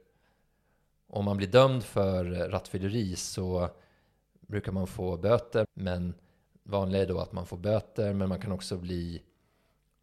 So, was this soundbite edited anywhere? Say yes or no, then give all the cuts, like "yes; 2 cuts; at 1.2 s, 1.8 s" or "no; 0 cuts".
yes; 1 cut; at 5.6 s